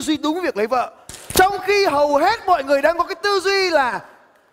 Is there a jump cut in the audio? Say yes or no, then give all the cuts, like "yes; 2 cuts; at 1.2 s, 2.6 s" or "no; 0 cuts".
no; 0 cuts